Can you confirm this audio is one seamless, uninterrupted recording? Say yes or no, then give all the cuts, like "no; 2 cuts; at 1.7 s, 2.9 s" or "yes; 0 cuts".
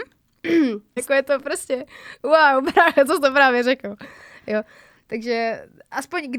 no; 1 cut; at 1.0 s